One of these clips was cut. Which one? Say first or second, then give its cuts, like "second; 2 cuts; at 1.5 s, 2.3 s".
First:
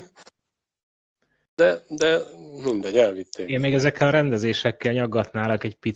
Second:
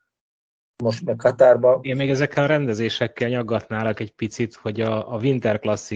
second; 1 cut; at 1.8 s